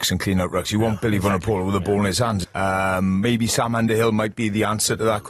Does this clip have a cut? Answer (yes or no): yes